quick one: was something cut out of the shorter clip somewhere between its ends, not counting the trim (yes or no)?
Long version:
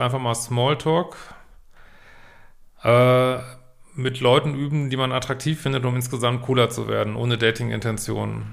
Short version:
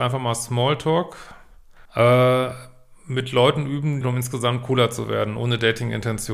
yes